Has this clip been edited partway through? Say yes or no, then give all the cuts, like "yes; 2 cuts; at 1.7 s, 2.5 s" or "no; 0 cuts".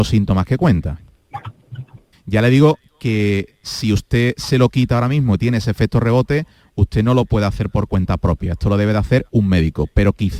yes; 1 cut; at 2.1 s